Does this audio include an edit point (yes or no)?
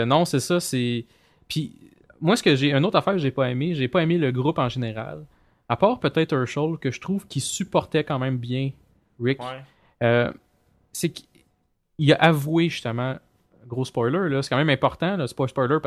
no